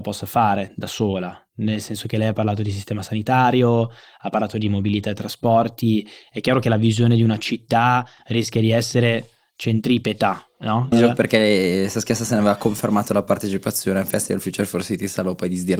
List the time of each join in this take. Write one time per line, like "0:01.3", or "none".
0:10.9